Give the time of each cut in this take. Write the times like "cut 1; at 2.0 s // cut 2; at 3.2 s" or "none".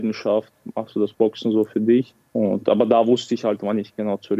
cut 1; at 2.3 s